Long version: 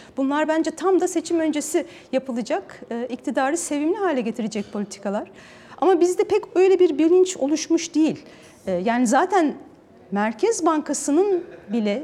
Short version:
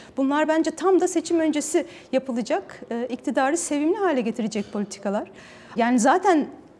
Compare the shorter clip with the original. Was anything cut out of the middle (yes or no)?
yes